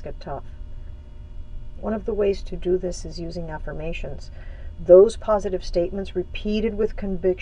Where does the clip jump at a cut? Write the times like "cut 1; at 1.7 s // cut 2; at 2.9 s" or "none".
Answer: cut 1; at 1.8 s